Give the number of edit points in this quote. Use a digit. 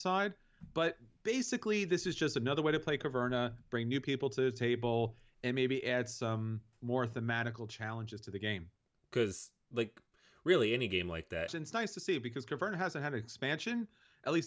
2